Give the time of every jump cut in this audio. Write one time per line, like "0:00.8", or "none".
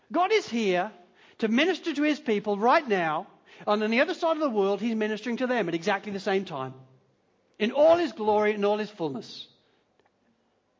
none